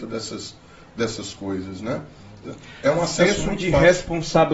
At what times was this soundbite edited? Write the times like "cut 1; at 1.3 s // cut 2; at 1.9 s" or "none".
cut 1; at 2.4 s